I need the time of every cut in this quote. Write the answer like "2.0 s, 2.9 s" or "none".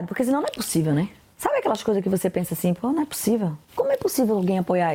none